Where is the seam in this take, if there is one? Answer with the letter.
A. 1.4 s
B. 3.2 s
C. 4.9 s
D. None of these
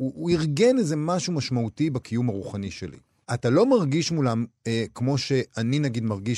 B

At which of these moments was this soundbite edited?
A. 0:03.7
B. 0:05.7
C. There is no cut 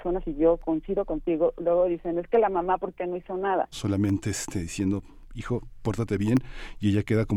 A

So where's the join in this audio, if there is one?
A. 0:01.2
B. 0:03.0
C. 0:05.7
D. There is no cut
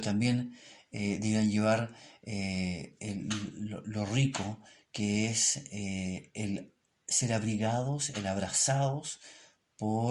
D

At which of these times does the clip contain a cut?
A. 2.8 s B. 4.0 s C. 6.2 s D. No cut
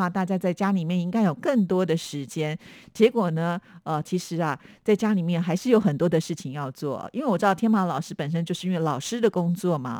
B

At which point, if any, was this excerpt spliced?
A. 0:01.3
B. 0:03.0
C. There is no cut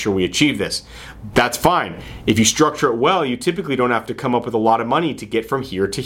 A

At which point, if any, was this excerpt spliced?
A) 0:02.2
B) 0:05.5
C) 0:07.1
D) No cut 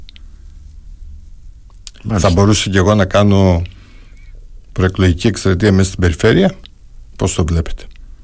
C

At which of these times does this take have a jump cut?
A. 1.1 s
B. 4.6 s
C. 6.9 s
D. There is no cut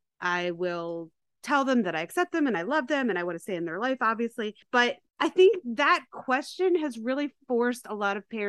B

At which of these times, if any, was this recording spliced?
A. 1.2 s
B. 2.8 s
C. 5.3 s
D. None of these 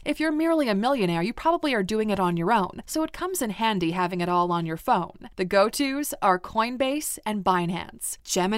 B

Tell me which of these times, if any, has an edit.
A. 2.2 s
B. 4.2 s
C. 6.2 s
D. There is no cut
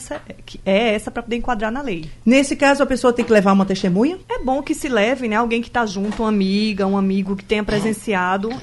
B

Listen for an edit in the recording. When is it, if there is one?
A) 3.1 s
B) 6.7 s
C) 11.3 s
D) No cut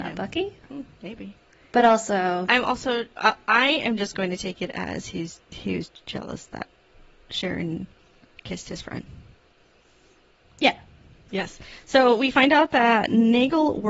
C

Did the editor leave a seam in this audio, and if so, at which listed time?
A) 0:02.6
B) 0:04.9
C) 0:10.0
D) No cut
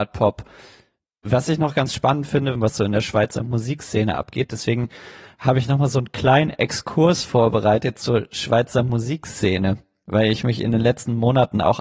A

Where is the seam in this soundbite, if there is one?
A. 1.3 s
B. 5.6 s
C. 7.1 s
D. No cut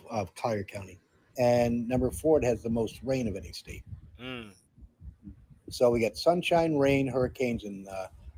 A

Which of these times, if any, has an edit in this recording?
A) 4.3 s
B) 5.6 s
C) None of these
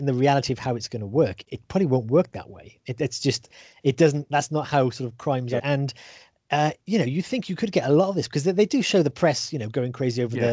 B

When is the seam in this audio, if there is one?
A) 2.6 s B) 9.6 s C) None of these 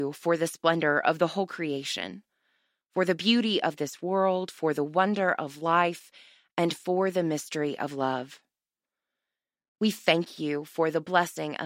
C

